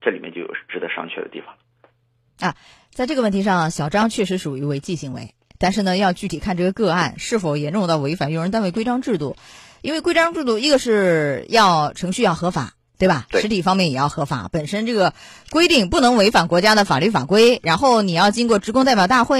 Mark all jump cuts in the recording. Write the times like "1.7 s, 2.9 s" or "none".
none